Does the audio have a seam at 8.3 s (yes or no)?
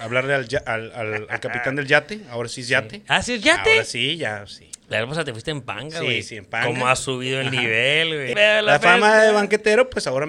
yes